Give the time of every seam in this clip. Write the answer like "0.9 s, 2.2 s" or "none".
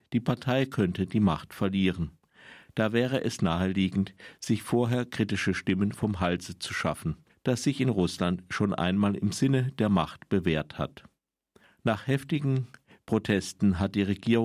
7.3 s